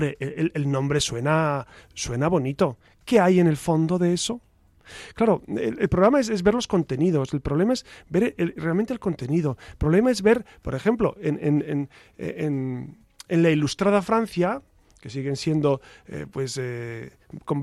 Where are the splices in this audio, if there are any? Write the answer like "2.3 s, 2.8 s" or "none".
none